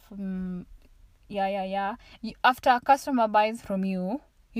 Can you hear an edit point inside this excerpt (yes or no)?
yes